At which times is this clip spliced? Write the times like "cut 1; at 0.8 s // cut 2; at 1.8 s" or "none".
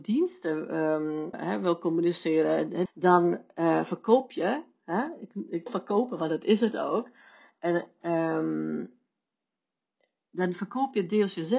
cut 1; at 1.3 s // cut 2; at 2.9 s // cut 3; at 5.7 s